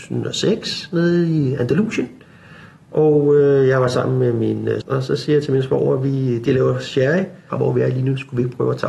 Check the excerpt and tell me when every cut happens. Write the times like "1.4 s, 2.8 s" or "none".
4.8 s, 7.5 s